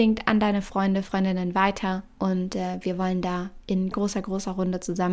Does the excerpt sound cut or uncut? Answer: cut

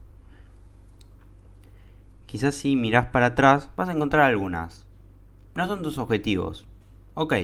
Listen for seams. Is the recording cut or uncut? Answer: uncut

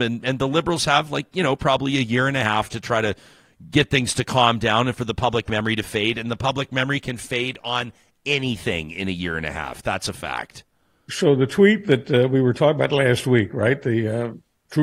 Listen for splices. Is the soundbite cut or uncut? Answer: uncut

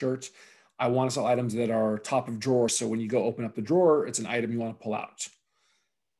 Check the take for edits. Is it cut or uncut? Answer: uncut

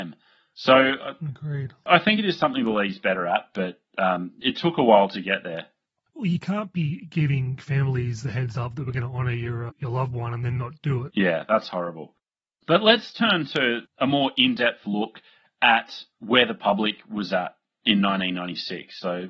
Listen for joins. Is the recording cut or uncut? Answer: cut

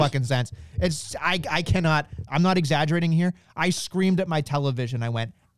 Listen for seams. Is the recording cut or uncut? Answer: cut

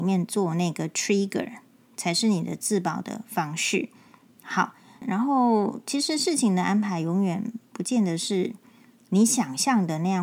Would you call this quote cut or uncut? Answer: cut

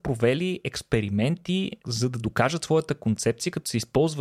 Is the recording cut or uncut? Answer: cut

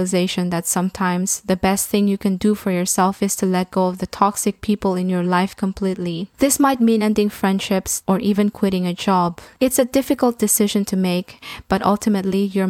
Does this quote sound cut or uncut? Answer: cut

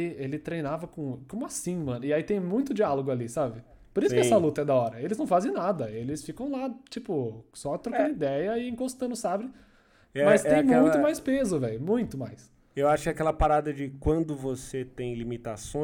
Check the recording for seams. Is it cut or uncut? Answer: uncut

